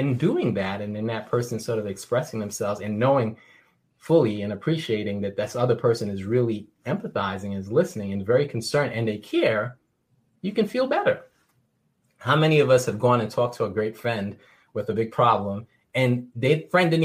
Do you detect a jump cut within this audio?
no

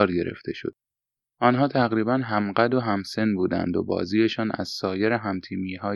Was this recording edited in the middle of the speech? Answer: yes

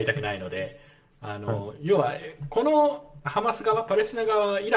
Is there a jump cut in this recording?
no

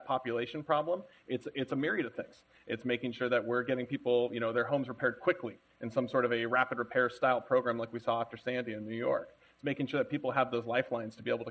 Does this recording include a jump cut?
no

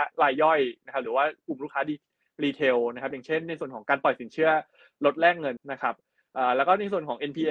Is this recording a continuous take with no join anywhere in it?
no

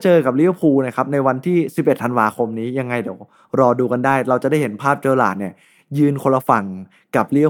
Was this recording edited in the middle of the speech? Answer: no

